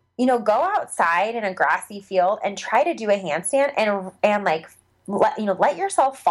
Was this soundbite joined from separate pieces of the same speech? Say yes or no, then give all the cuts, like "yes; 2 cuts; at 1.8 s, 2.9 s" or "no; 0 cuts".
no; 0 cuts